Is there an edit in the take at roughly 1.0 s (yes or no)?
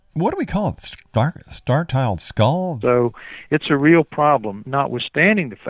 no